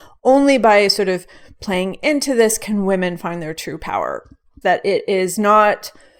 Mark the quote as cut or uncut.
cut